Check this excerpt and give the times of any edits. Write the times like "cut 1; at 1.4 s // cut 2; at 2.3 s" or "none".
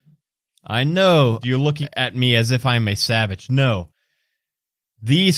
cut 1; at 1.4 s